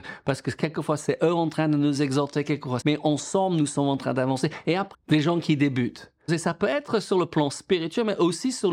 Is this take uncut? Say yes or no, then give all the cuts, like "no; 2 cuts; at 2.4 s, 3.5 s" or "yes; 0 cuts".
no; 3 cuts; at 2.8 s, 4.9 s, 6.3 s